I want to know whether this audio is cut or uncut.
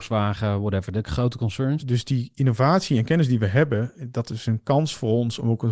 cut